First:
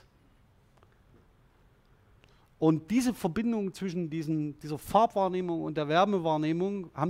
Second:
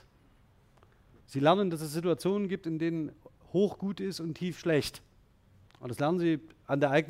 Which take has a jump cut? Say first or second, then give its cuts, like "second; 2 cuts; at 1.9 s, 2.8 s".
second; 2 cuts; at 1.2 s, 5.7 s